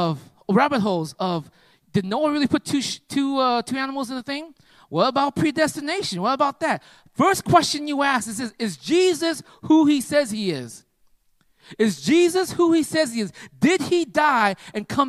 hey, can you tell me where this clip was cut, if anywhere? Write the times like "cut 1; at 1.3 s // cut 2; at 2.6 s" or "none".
none